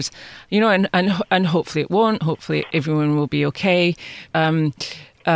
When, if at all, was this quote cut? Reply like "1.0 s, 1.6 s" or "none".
4.3 s